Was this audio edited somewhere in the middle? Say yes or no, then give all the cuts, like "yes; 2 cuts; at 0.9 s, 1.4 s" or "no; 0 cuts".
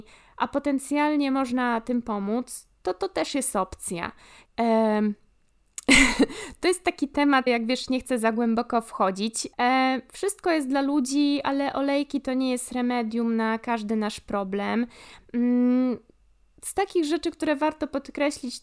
yes; 3 cuts; at 4.5 s, 7.5 s, 9.5 s